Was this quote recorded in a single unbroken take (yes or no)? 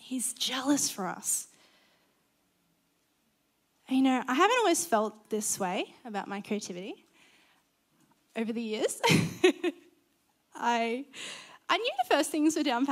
yes